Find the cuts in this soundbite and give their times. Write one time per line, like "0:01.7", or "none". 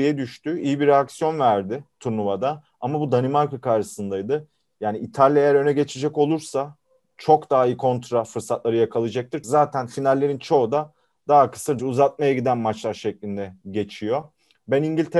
0:09.4
0:11.8